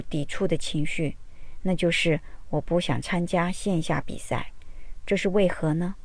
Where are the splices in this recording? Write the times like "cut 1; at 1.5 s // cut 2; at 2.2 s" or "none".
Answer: none